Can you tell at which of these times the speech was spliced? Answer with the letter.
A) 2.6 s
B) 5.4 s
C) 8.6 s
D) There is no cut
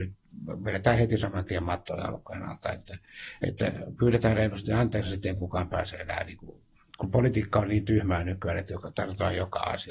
D